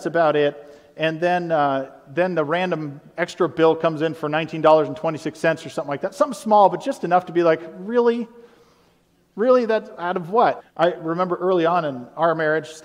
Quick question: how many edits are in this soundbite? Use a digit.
1